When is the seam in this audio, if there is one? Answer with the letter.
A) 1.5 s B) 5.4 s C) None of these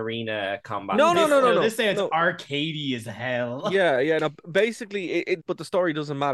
B